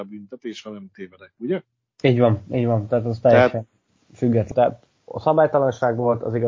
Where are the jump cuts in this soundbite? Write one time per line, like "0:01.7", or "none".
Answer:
0:04.5